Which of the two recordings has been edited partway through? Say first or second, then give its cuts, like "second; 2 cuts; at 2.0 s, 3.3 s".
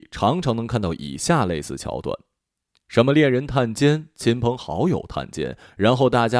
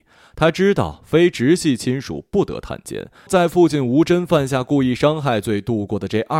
second; 1 cut; at 3.3 s